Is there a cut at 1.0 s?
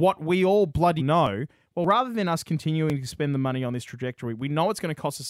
yes; 1 cut; at 1.0 s

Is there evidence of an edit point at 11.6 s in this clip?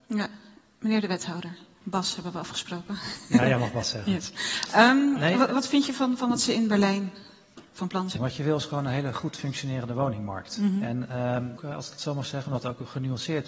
yes; 2 cuts; at 8.2 s, 11.6 s

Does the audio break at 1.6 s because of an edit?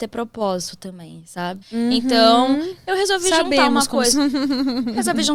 yes; 2 cuts; at 1.6 s, 4.1 s

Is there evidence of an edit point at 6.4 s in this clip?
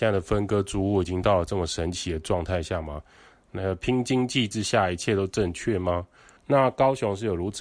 yes; 1 cut; at 6.4 s

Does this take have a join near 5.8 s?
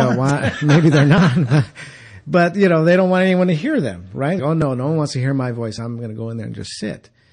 no; 1 cut; at 4.4 s

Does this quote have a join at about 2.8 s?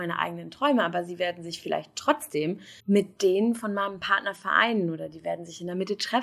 yes; 1 cut; at 2.8 s

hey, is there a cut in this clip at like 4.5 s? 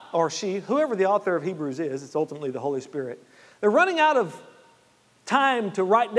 no; 0 cuts

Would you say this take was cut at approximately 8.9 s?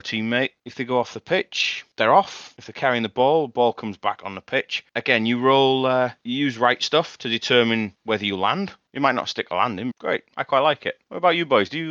yes; 2 cuts; at 8.9 s, 9.9 s

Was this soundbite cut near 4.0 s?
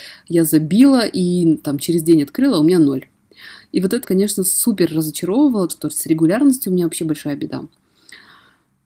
yes; 2 cuts; at 4.0 s, 5.7 s

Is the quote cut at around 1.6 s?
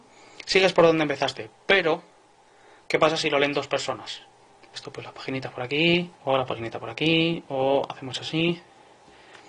no; 2 cuts; at 4.7 s, 6.1 s

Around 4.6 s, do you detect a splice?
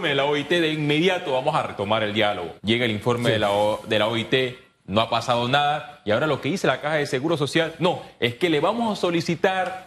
no; 1 cut; at 2.6 s

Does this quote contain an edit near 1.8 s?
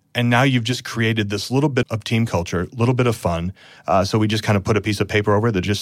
yes; 2 cuts; at 1.8 s, 3.8 s

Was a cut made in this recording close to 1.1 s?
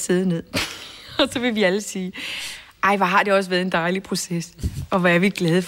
no; 0 cuts

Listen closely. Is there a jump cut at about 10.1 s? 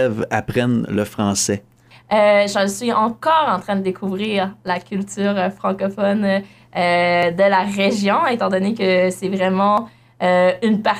no; 1 cut; at 1.9 s

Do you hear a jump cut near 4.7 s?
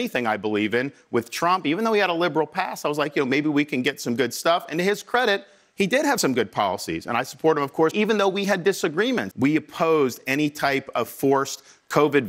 no; 2 cuts; at 7.9 s, 9.3 s

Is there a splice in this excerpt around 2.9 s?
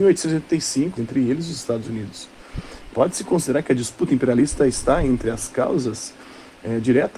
yes; 2 cuts; at 1.0 s, 2.9 s

